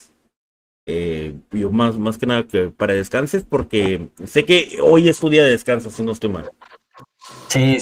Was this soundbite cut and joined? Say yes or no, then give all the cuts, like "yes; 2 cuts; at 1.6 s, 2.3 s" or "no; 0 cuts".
no; 0 cuts